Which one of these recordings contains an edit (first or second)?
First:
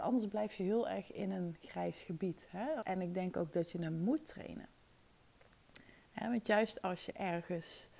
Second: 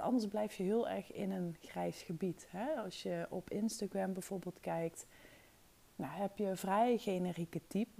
first